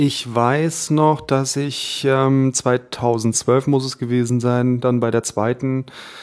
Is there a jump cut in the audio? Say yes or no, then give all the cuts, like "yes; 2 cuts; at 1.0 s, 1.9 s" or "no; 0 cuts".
no; 0 cuts